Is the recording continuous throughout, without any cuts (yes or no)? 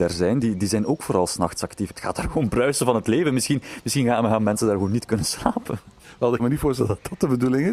no